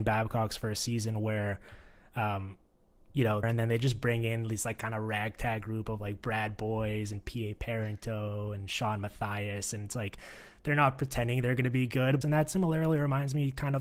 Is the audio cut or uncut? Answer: cut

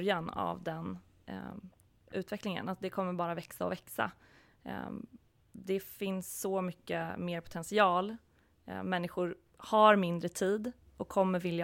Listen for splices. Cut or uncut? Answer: uncut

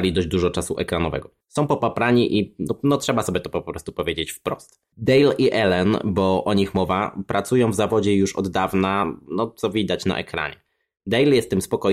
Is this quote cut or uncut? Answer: uncut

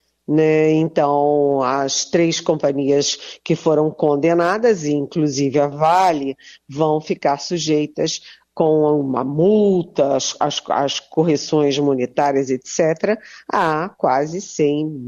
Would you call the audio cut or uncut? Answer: uncut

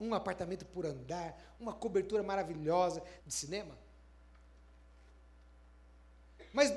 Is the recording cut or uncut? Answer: cut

